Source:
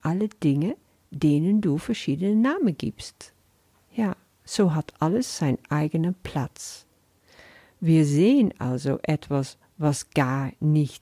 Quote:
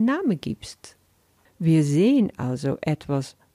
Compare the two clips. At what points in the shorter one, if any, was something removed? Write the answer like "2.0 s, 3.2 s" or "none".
1.5 s